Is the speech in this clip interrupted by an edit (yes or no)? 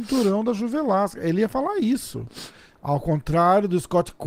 no